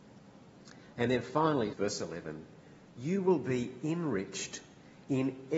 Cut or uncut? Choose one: cut